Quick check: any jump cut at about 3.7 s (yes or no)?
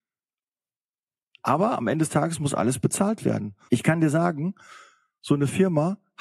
yes